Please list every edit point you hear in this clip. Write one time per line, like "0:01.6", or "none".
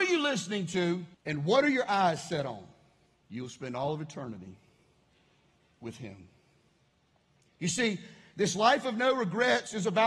0:01.1
0:03.2

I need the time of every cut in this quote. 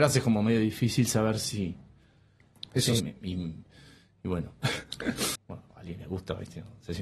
0:03.0
0:05.4

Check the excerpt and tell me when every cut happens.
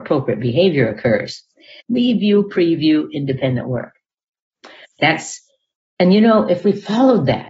0:01.8
0:04.8

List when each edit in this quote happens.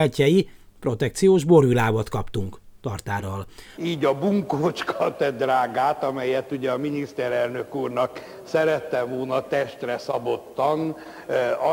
0:03.7

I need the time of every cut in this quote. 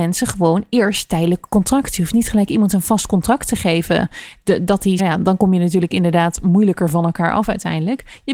0:05.0

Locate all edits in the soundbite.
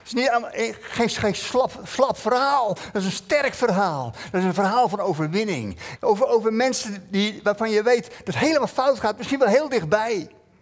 0:06.0

